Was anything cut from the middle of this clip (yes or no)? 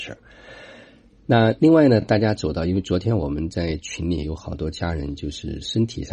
no